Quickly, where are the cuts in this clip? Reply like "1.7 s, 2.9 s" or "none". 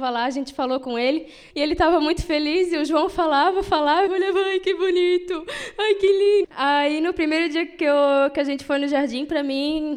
1.5 s, 4.1 s, 6.4 s